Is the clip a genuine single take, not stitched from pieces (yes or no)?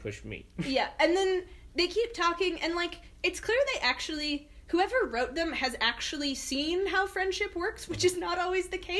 yes